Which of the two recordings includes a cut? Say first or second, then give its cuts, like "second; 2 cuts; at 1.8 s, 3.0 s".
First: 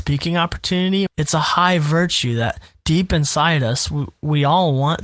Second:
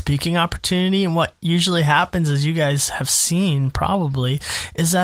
first; 1 cut; at 1.1 s